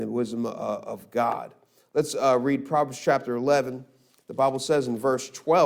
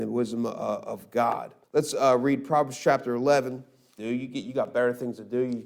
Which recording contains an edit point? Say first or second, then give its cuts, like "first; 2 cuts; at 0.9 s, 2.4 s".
second; 2 cuts; at 1.6 s, 4.0 s